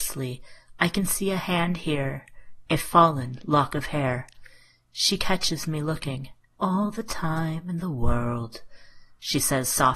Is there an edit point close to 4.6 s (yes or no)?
no